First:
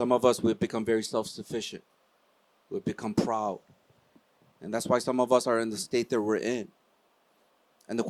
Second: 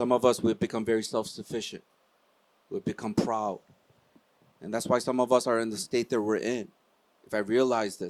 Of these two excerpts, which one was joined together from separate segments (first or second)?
second